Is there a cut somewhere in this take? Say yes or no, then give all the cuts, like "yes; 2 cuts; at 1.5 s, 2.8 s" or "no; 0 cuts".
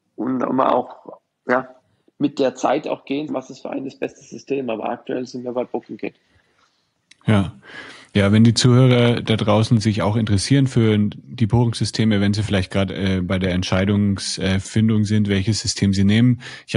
yes; 1 cut; at 3.3 s